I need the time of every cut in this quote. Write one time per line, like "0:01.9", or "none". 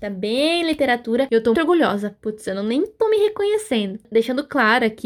0:01.5